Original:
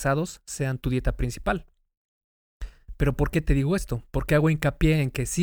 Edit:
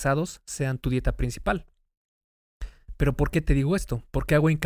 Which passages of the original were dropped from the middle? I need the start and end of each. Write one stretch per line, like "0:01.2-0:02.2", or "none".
none

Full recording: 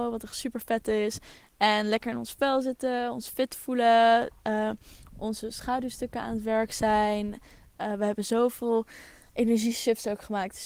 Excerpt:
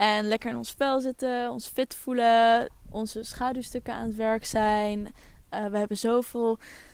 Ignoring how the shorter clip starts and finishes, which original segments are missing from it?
0:04.4-0:05.1

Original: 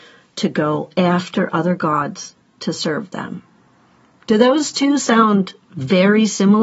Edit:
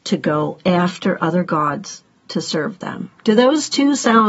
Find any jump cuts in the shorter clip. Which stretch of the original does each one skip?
0:03.5-0:04.2

